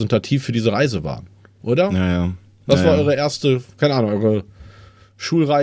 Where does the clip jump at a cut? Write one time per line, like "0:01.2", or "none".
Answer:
none